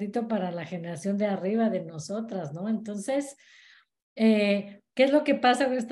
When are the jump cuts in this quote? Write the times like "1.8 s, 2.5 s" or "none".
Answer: none